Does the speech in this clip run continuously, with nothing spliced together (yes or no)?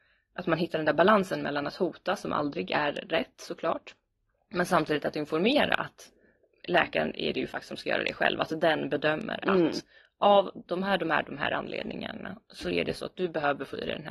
yes